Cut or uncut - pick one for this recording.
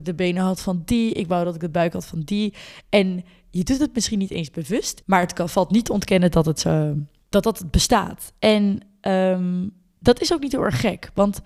cut